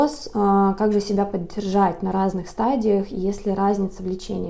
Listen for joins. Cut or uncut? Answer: uncut